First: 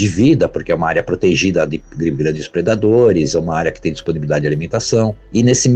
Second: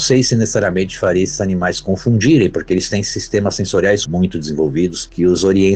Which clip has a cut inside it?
second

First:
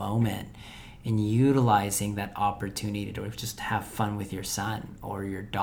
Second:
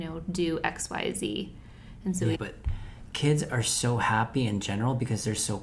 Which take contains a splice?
second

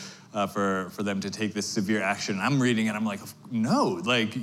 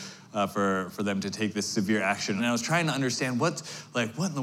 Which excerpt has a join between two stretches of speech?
second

